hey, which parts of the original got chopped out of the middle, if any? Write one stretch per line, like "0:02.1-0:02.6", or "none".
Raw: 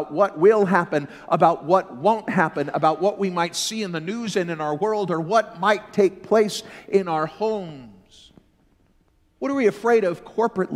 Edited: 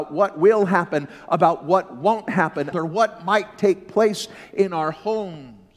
0:02.7-0:05.1